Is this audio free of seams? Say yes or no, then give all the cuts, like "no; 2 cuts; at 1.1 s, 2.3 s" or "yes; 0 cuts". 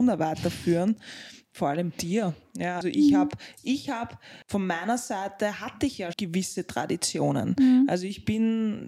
no; 3 cuts; at 2.8 s, 4.4 s, 6.1 s